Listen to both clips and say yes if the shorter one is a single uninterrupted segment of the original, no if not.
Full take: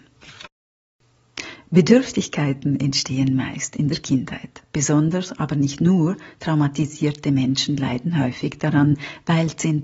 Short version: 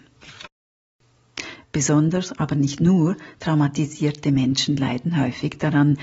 no